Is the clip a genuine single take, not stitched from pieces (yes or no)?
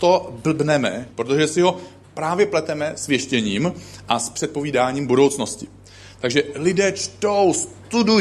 no